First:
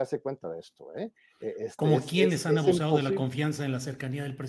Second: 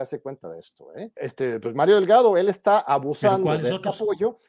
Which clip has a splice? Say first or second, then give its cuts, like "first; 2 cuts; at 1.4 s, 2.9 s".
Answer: second; 1 cut; at 1.2 s